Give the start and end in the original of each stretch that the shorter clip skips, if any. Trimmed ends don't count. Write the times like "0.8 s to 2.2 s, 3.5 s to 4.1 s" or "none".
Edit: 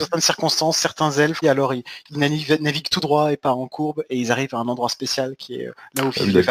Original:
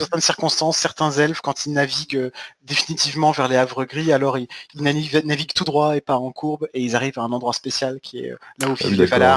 1.4 s to 4.1 s